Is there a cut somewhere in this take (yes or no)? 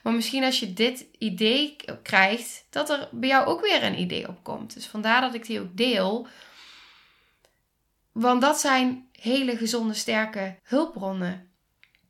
yes